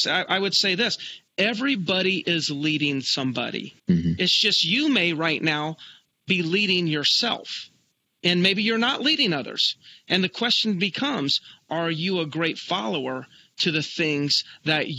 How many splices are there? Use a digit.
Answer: 1